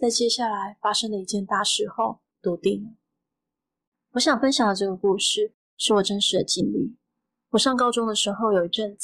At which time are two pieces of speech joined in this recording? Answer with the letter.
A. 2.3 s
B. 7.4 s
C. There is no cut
A